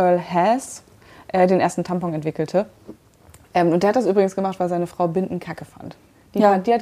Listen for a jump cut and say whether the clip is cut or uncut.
uncut